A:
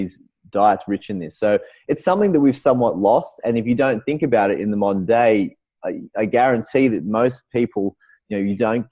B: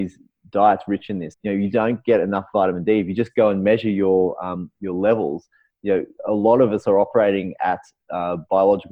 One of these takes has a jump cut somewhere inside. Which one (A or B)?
B